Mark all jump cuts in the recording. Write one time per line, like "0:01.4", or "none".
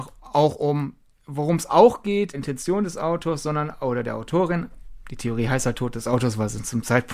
0:02.3